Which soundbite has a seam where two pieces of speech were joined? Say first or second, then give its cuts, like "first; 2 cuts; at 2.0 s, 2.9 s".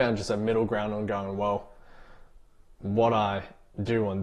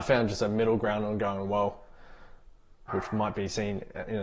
second; 1 cut; at 2.9 s